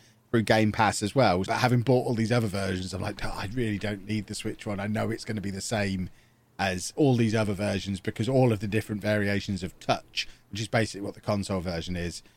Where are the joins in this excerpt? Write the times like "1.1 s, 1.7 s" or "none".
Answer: 1.5 s